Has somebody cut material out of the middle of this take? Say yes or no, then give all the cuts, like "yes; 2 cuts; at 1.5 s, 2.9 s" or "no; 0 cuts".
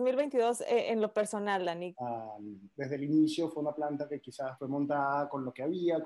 yes; 2 cuts; at 1.9 s, 4.6 s